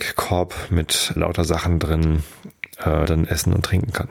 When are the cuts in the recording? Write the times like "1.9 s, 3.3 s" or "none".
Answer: 1.2 s, 3.1 s

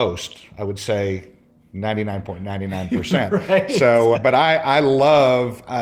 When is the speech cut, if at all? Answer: 4.1 s

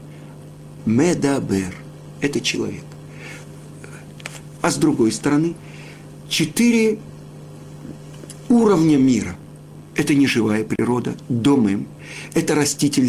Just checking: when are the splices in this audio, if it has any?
4.6 s

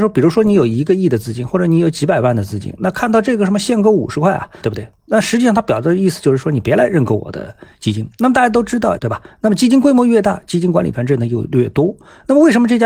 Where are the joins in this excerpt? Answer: 4.6 s, 9.0 s

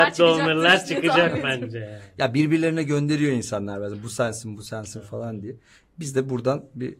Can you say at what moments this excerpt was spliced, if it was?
none

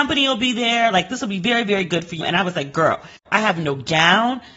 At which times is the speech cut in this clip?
2.2 s

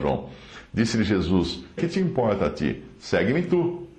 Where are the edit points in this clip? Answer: 1.8 s

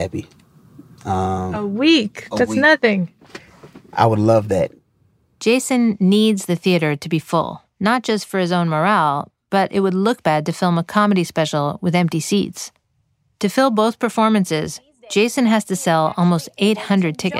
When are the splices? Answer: 7.7 s

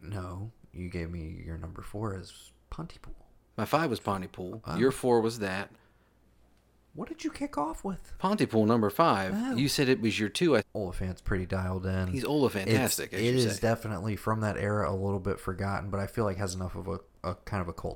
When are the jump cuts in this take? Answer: 10.6 s

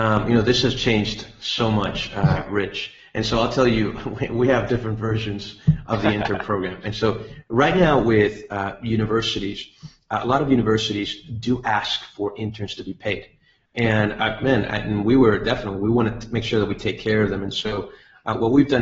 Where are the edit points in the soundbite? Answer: none

